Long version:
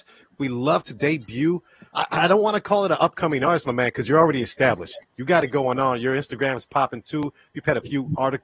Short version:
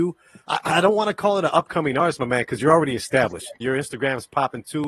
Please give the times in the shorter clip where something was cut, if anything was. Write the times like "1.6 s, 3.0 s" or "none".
3.6 s